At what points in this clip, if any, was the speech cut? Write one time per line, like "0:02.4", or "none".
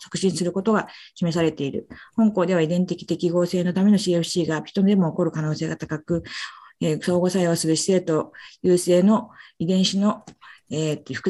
none

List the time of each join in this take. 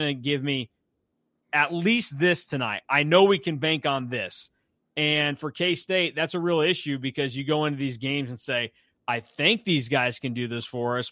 none

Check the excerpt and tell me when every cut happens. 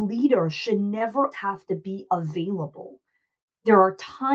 0:01.3

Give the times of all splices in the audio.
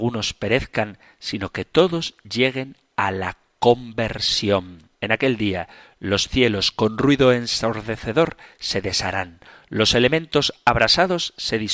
0:04.9

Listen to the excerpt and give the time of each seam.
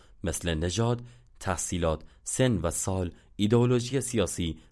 0:01.3

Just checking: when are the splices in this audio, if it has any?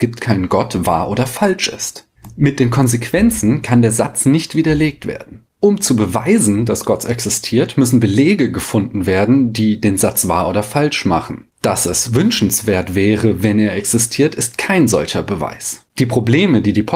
0:15.9

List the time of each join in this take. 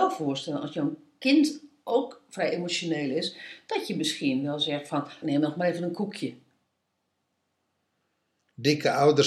0:05.2

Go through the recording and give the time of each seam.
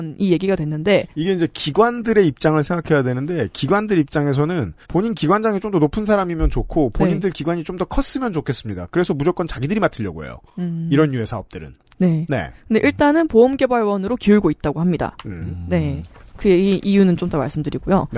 0:04.8

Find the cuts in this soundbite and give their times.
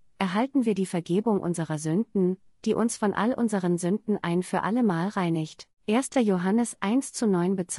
none

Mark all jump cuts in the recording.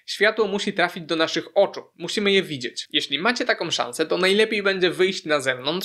none

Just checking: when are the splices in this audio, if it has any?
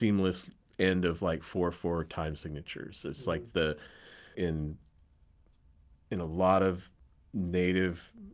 0:04.3

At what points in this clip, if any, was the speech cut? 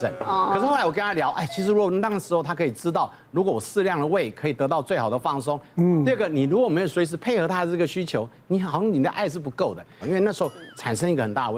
0:05.7
0:10.0

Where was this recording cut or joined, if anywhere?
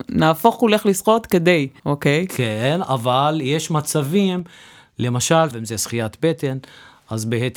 0:01.8
0:05.5

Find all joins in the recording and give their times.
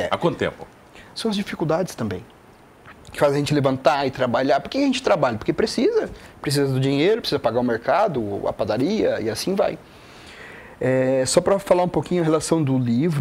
0:01.1
0:07.2

